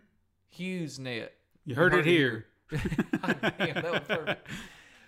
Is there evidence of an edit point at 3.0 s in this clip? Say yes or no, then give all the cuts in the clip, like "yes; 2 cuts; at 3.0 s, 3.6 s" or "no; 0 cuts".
no; 1 cut; at 1.5 s